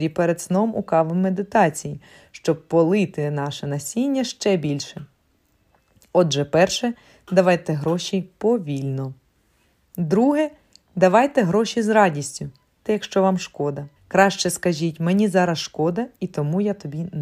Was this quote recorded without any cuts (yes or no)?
no